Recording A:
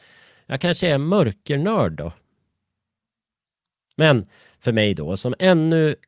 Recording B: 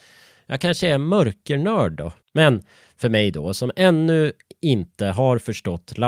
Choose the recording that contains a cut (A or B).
B